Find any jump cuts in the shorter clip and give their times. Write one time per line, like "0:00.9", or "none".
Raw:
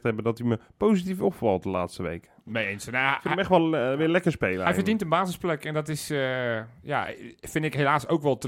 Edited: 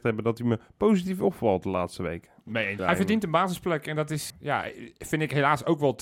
0:02.8
0:04.3